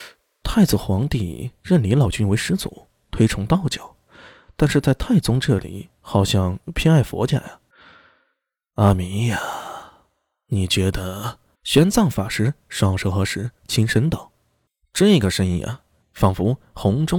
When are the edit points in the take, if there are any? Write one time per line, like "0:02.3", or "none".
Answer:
0:07.7
0:11.5
0:16.0